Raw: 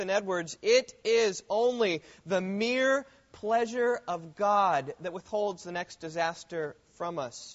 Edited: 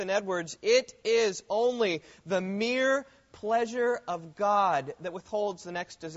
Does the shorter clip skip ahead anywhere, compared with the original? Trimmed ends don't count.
no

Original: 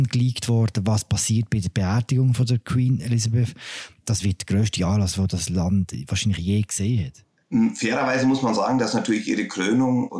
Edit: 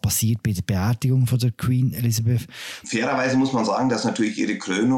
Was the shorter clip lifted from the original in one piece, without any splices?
no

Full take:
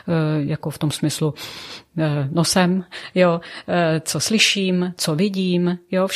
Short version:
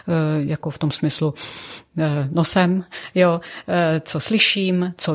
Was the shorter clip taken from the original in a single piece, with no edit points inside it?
yes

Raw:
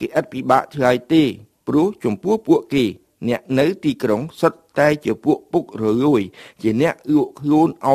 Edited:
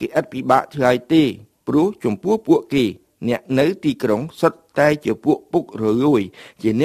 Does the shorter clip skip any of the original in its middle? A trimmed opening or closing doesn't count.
no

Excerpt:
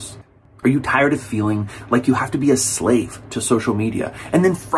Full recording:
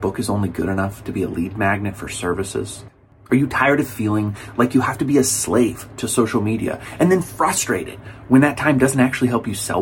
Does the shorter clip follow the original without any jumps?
yes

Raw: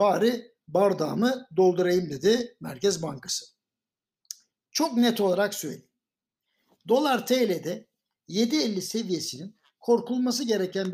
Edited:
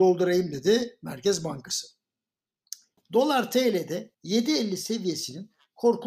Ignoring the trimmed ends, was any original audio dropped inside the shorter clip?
yes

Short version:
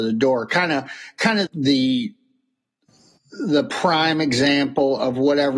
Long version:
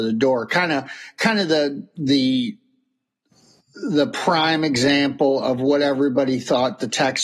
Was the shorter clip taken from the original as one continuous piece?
no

